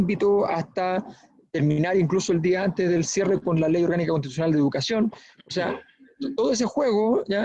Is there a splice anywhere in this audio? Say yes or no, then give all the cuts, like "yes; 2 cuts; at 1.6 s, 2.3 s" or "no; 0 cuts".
no; 0 cuts